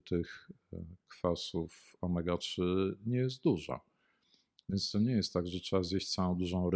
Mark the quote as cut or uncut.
uncut